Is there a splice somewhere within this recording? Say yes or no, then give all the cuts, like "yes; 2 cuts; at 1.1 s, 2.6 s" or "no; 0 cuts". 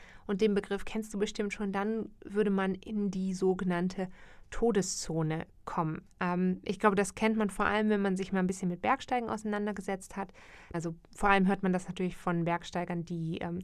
yes; 1 cut; at 10.7 s